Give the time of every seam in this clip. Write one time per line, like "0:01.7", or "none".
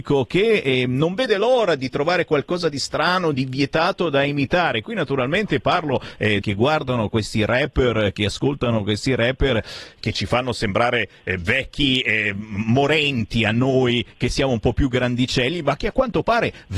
0:06.4
0:10.0